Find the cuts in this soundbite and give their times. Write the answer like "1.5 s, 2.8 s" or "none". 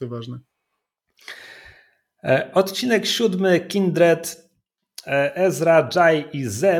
none